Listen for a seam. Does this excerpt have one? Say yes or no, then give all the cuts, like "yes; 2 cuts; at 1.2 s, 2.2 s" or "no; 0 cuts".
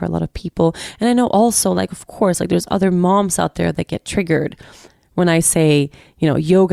no; 0 cuts